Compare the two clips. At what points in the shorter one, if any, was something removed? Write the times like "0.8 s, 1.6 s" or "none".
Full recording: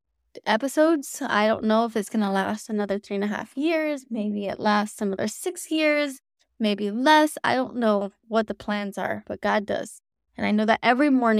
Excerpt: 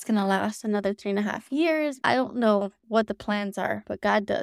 2.0 s